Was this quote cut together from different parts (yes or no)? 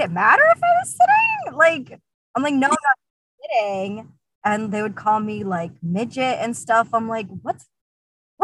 no